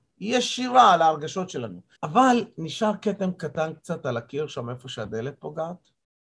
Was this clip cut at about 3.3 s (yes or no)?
no